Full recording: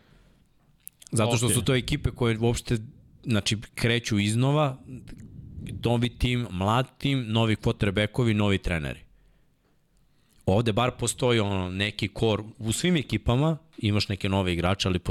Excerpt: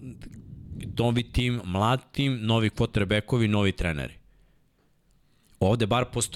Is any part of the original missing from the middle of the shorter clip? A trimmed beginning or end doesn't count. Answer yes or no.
no